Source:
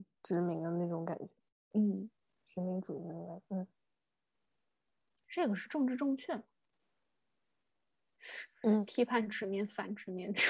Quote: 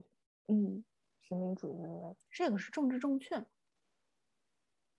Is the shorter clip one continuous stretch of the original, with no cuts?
no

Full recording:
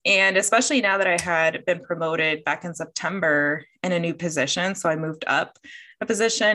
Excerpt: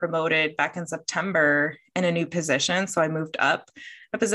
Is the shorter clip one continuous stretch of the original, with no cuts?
yes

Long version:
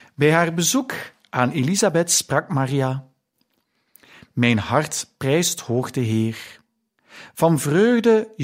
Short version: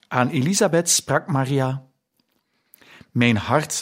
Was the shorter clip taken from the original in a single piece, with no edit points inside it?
yes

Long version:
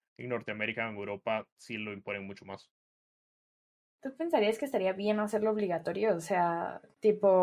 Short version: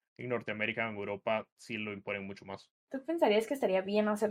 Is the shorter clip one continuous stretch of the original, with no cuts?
no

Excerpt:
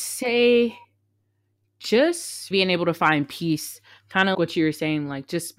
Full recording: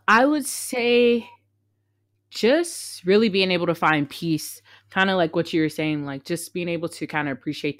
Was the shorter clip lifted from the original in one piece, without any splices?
no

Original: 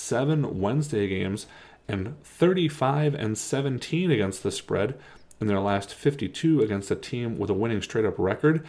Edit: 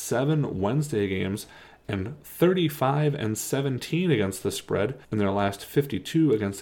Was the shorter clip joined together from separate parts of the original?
yes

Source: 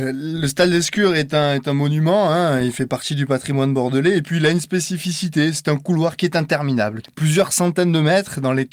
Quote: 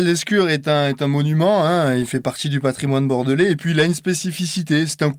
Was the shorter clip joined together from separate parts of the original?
no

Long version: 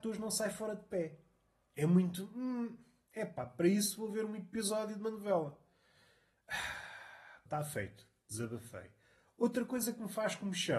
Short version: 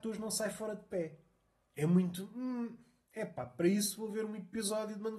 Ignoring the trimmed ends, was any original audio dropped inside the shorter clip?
no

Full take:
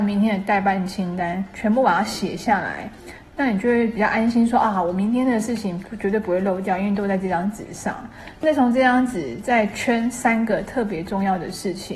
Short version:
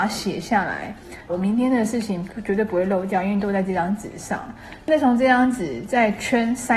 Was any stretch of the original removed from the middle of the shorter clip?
yes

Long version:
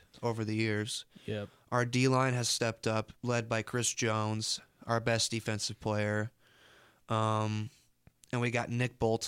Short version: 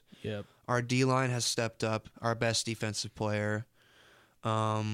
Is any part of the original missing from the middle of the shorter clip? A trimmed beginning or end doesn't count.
yes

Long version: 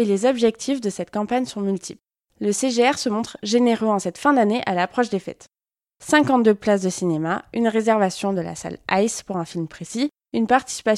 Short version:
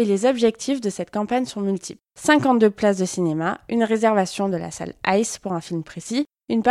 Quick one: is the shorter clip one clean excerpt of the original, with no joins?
no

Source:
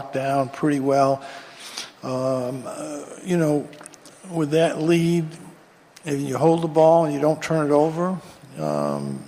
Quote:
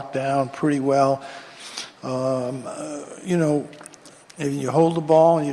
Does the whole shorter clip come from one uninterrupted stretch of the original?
no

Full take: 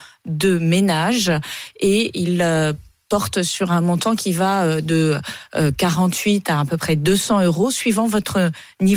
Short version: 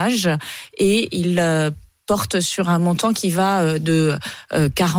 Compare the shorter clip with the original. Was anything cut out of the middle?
no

